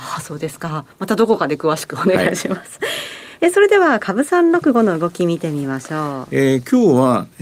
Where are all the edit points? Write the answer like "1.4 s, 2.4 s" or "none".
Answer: none